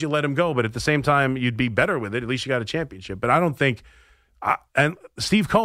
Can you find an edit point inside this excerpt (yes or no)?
no